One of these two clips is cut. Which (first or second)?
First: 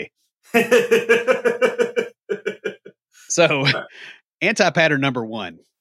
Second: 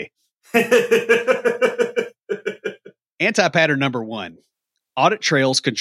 second